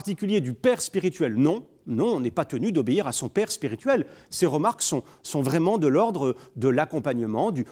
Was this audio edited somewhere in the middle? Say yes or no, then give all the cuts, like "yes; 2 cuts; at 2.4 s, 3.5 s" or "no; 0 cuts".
no; 0 cuts